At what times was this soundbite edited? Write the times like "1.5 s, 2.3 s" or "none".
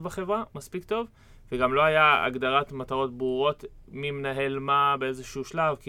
none